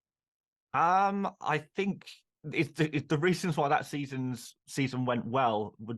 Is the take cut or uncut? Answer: cut